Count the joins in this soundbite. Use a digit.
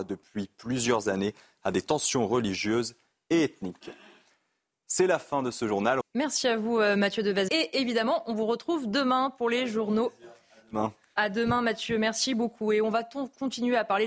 2